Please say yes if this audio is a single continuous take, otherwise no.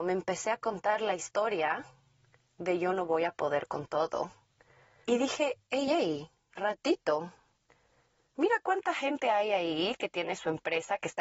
no